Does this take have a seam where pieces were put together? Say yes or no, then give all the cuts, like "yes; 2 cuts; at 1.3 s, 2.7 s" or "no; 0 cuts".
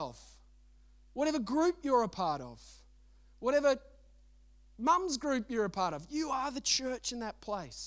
no; 0 cuts